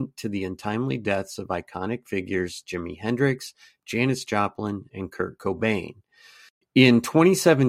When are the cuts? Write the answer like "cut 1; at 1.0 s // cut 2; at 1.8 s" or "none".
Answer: cut 1; at 4.9 s